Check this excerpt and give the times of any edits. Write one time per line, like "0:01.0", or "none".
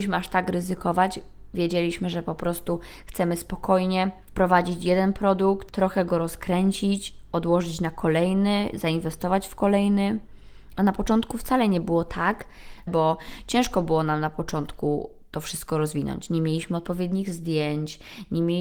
0:10.8
0:12.9